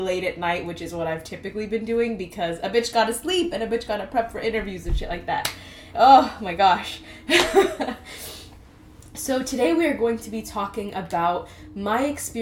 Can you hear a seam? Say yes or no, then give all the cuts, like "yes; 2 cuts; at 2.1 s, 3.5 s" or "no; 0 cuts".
yes; 1 cut; at 5.9 s